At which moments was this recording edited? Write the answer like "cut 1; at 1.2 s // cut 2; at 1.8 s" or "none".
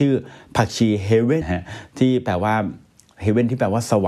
cut 1; at 1.4 s